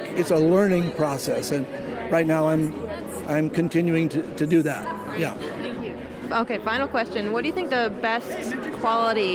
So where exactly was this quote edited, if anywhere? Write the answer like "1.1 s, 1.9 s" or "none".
none

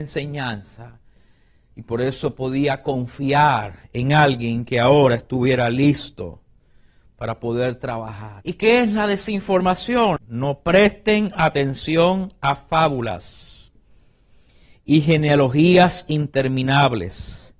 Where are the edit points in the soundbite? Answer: 8.4 s, 10.2 s

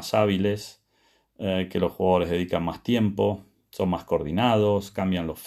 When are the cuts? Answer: none

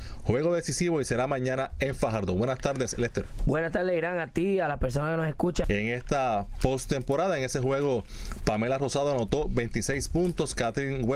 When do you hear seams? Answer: 5.6 s

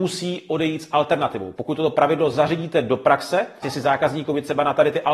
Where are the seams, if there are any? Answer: 1.5 s, 3.6 s

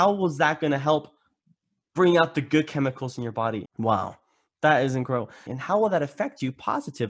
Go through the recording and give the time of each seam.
3.6 s, 5.5 s

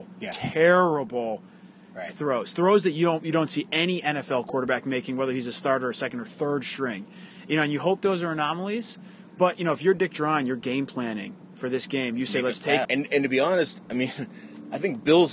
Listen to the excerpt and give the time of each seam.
12.8 s

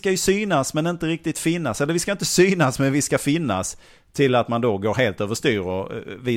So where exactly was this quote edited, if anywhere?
none

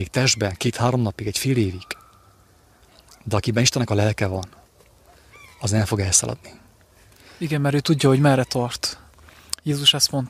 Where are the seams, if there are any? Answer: none

